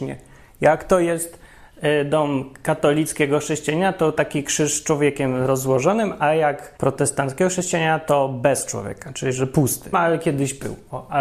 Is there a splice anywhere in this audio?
yes; 2 cuts; at 6.8 s, 9.9 s

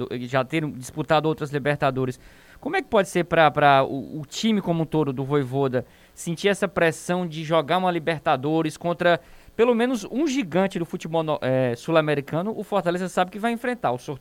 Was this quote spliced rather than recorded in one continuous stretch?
no; 0 cuts

